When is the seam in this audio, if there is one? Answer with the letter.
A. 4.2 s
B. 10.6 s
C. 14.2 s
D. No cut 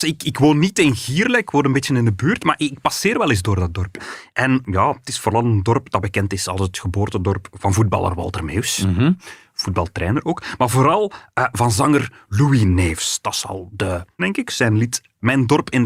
C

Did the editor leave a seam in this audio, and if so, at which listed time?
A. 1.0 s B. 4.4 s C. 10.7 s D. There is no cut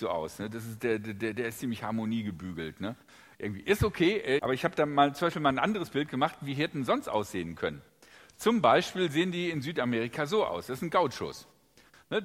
B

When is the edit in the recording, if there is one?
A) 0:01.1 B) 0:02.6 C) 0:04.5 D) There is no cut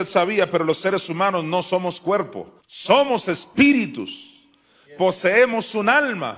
B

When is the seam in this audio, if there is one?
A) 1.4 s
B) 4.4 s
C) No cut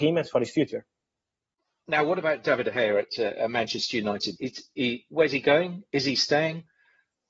B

